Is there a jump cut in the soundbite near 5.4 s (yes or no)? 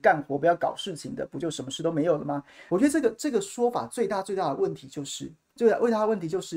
no